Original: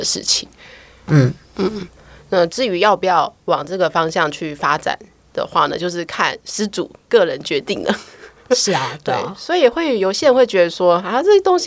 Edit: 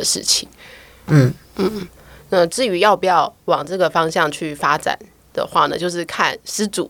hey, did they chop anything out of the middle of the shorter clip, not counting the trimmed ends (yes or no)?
no